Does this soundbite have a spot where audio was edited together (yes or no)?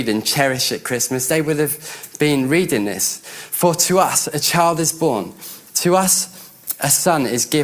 no